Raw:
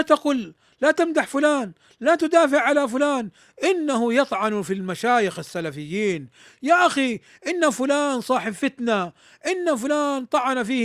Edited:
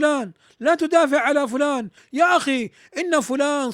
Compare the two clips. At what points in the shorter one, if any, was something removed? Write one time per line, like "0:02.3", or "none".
0:02.0

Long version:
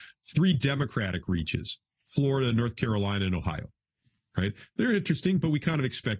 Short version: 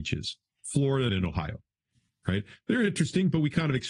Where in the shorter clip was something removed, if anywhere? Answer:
0:01.1

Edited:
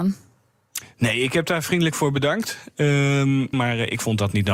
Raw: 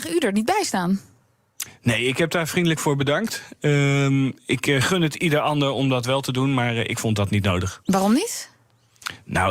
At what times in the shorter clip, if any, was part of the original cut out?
0:03.5

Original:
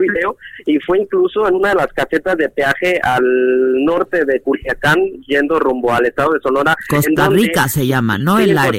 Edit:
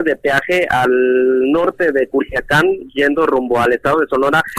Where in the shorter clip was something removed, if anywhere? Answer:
none

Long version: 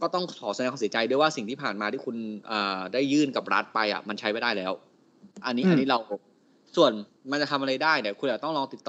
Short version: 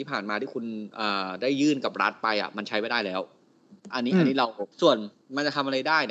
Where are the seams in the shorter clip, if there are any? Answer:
0:04.7

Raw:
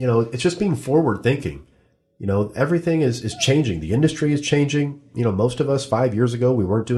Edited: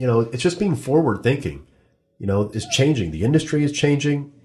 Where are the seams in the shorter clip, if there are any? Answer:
0:02.5

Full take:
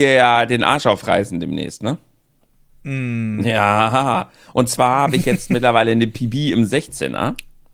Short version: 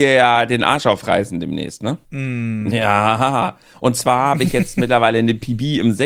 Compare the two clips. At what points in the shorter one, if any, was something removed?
0:02.0

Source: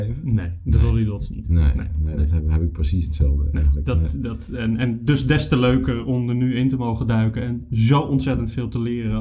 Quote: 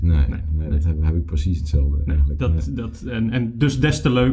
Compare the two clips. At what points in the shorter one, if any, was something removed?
none

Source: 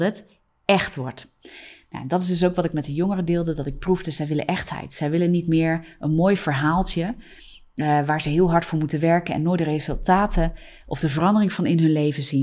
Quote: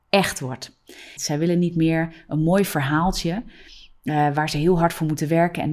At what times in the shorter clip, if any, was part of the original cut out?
0:01.2

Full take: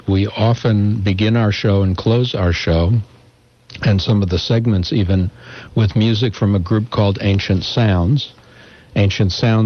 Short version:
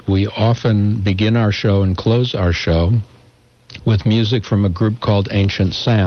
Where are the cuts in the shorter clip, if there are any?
0:03.8

